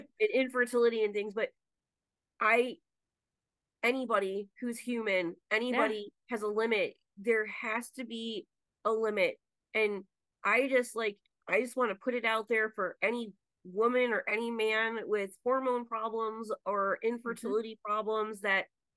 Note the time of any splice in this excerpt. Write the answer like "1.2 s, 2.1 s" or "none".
none